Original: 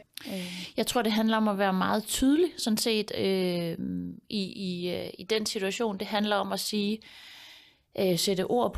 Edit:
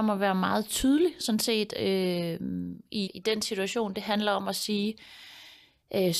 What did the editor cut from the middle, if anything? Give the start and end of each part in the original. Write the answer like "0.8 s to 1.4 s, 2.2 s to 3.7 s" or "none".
4.5 s to 5.1 s